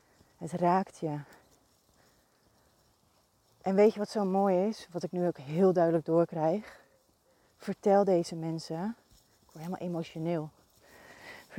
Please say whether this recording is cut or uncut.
uncut